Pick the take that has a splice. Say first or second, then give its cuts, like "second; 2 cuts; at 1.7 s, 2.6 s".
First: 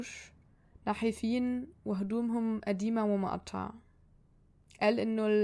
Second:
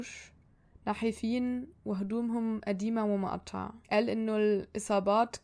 second; 1 cut; at 3.8 s